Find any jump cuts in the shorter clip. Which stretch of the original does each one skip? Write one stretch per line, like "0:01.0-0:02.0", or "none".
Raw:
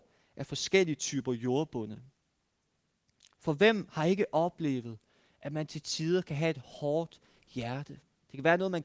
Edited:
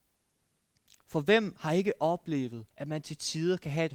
0:05.0-0:05.4